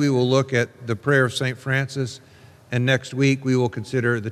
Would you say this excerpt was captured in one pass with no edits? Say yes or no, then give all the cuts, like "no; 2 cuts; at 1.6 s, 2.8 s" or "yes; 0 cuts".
yes; 0 cuts